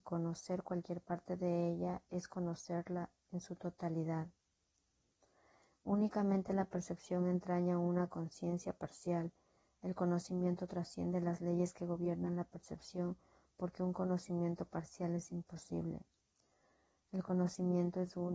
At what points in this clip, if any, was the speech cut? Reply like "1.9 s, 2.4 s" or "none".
none